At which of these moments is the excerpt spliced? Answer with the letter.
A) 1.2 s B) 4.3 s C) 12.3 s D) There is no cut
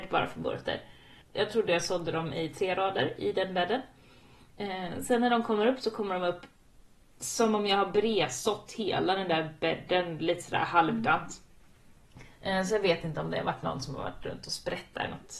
D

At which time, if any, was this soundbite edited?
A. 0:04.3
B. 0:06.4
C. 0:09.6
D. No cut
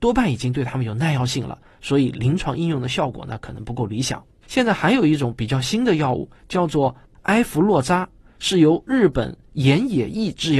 A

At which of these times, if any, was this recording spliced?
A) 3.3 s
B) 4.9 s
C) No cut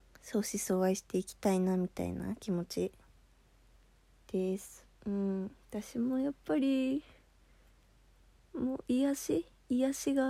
B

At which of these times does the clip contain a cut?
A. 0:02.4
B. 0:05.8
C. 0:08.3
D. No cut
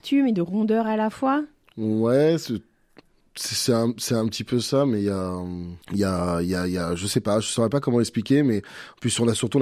B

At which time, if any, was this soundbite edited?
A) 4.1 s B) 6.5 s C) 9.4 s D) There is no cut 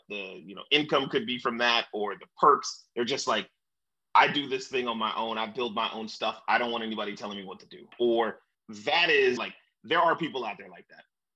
C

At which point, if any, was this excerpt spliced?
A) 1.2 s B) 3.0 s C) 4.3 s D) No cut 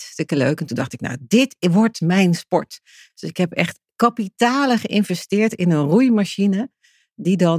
D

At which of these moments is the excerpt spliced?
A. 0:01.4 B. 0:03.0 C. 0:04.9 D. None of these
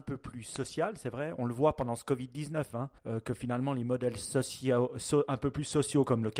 B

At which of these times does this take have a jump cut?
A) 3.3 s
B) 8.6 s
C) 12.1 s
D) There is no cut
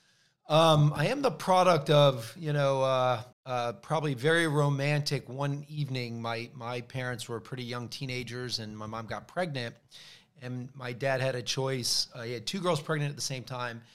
A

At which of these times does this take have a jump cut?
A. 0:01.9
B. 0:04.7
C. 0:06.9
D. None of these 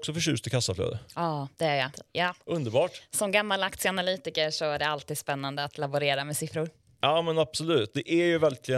A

